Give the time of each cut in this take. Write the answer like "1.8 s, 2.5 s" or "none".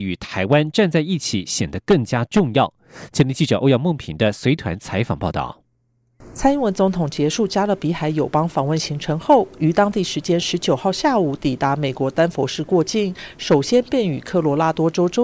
none